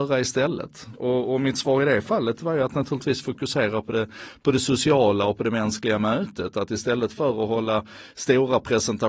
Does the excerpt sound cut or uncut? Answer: uncut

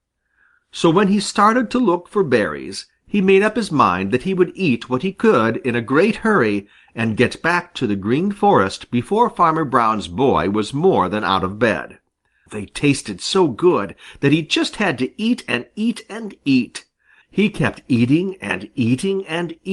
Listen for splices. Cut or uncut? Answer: cut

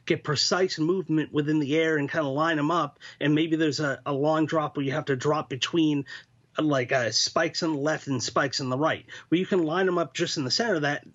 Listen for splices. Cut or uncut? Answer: uncut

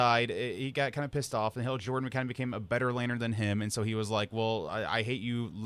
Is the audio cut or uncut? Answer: uncut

